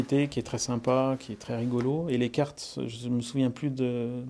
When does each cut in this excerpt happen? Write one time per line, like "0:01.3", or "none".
none